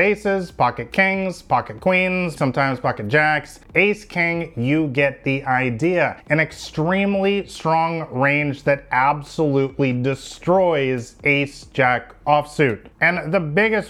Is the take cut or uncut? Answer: cut